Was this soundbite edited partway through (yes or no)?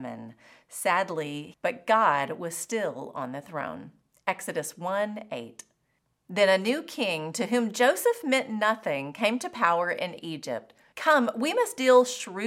yes